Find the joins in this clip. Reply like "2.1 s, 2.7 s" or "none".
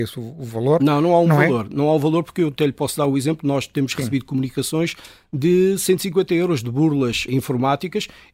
7.3 s